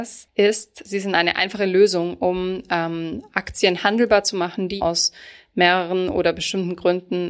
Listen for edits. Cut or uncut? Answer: cut